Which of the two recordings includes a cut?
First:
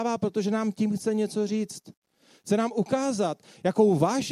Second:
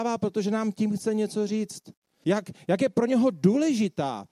second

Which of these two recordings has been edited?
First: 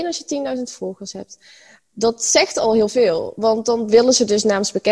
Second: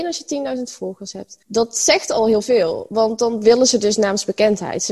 second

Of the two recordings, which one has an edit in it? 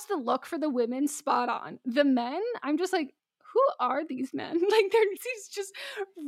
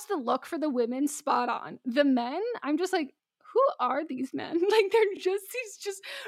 first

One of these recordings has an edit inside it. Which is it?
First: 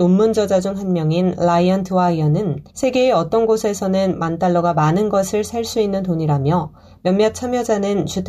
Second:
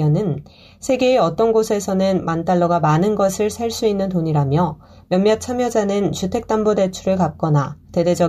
first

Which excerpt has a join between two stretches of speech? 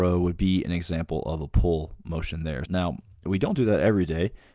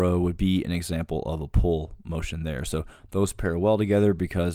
first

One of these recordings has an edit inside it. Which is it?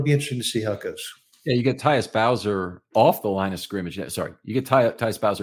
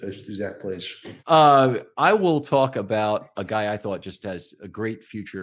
second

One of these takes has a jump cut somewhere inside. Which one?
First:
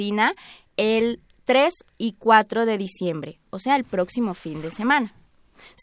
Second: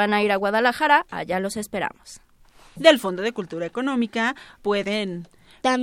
second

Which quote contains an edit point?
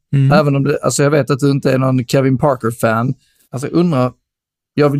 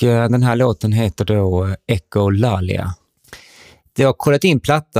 first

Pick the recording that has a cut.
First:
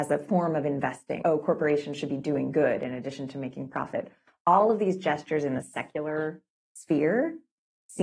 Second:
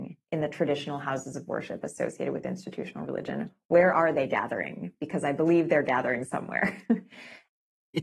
first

